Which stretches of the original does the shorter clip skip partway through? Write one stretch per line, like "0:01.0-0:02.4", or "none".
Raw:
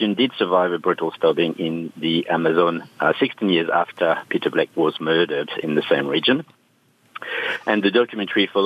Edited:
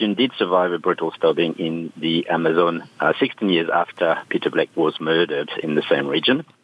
none